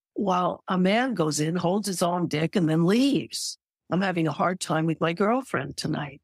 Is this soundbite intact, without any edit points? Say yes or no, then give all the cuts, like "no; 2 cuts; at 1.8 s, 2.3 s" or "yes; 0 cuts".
no; 1 cut; at 3.8 s